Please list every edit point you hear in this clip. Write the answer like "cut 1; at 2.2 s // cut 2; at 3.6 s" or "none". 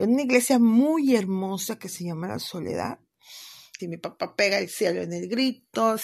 cut 1; at 3.8 s